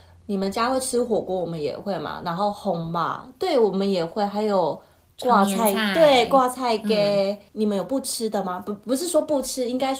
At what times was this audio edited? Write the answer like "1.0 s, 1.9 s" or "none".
7.5 s